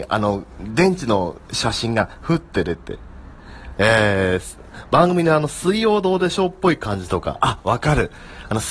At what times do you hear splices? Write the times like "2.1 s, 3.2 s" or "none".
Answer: 3.7 s